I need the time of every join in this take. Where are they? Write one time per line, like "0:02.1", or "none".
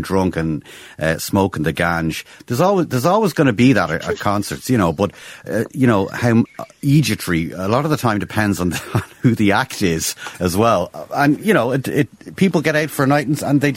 0:06.5